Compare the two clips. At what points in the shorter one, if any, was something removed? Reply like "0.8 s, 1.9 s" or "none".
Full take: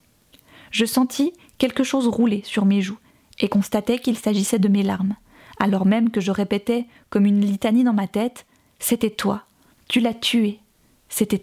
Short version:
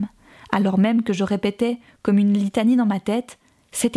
none